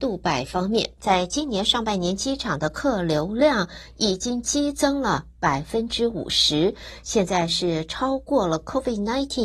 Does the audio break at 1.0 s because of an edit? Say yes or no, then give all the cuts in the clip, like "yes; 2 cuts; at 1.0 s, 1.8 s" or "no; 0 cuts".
yes; 1 cut; at 1.0 s